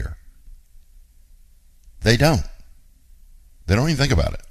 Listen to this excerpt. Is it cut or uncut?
cut